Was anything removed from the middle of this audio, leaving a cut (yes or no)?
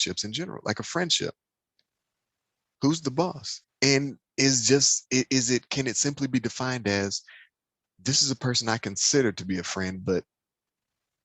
yes